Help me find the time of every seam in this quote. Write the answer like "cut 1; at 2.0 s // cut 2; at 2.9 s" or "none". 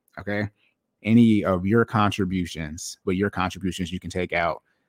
cut 1; at 1.0 s // cut 2; at 3.0 s